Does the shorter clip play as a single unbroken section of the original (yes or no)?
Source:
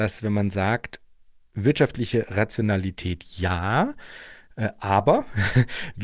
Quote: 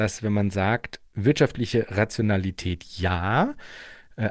no